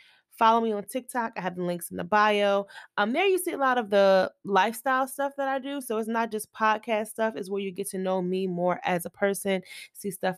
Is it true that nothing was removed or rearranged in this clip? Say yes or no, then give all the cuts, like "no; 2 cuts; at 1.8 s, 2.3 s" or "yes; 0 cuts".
yes; 0 cuts